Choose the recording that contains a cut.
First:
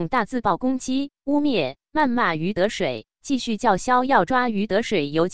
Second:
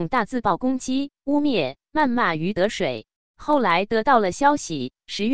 second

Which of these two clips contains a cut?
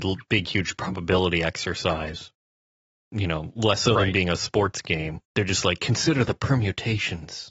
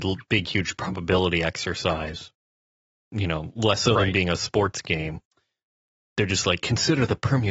first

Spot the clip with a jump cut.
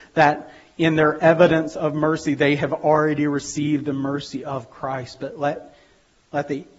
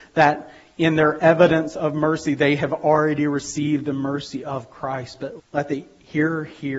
second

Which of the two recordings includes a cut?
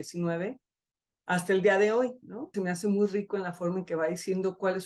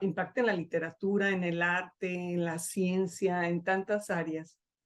first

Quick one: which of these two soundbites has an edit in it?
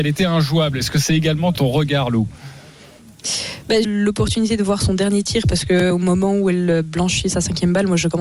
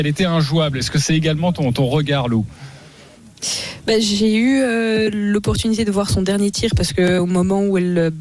first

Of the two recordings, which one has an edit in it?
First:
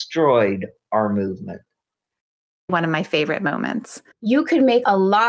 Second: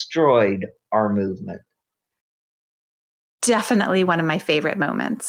first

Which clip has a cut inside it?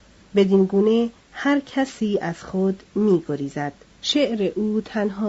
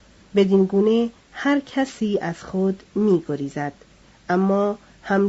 first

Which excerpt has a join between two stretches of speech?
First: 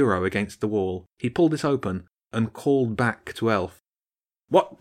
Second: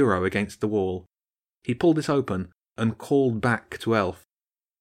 first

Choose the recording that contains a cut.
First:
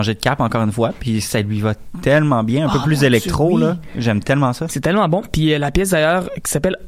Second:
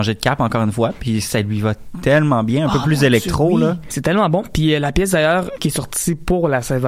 second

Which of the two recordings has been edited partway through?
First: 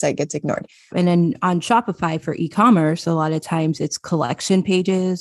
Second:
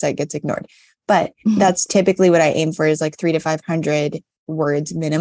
first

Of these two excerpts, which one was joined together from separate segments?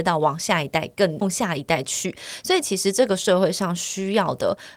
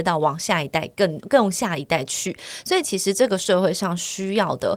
first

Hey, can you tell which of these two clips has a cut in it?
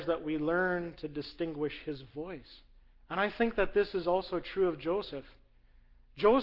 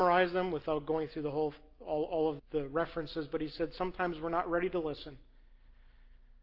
second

